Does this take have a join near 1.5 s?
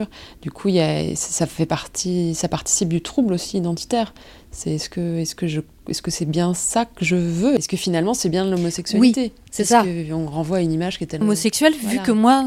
no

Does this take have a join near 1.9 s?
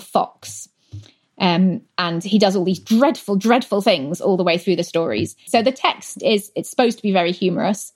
no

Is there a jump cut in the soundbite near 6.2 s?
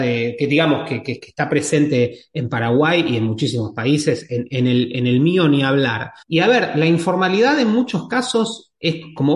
yes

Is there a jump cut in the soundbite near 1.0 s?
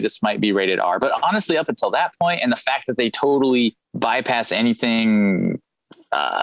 no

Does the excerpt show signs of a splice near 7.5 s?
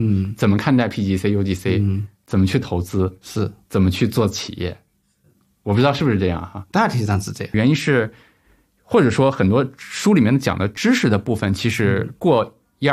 yes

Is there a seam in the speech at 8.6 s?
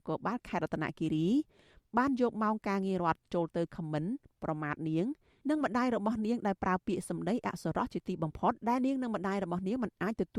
yes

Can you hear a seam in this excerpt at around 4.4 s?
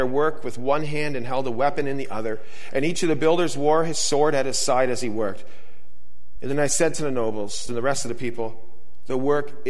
no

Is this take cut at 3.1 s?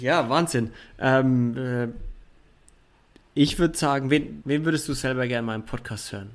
no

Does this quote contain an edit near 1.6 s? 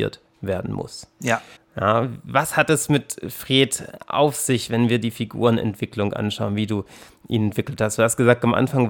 yes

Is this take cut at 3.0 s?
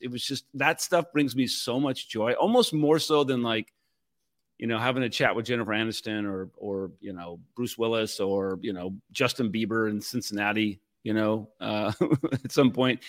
no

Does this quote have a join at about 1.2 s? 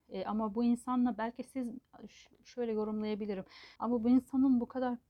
no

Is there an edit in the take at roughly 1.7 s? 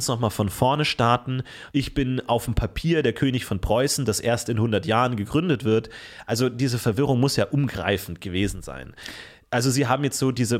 yes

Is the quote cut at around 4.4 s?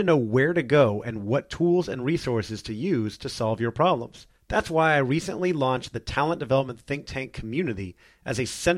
yes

